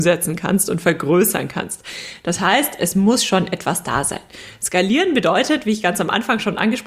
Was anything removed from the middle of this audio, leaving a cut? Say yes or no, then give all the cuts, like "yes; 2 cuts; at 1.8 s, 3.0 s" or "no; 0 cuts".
no; 0 cuts